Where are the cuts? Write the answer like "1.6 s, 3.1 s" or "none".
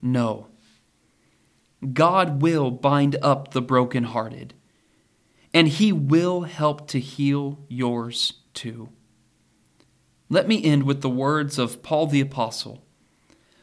none

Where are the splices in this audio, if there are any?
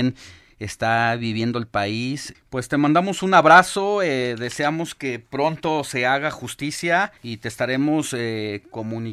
2.3 s, 7.2 s

